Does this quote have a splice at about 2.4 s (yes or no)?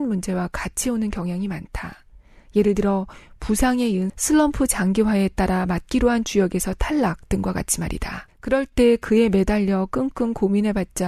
no